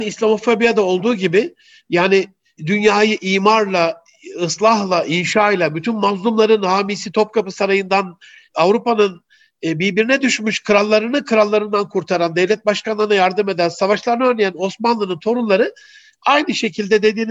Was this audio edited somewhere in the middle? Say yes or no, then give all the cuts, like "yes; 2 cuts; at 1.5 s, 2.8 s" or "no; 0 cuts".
no; 0 cuts